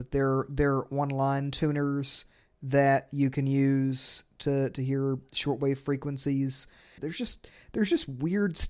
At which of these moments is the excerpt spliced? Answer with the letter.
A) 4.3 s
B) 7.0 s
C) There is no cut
B